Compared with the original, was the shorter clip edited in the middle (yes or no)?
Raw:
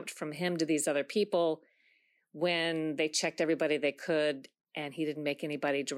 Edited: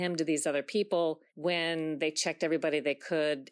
yes